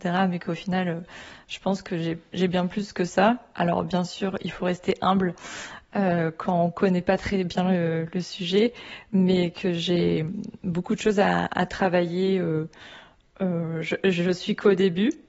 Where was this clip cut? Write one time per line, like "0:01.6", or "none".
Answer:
none